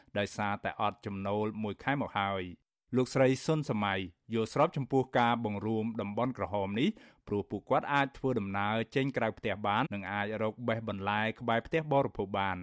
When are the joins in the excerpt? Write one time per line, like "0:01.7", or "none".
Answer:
0:09.8